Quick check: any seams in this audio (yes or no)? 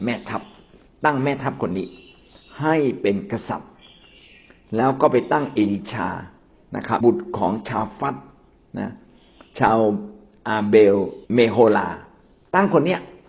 yes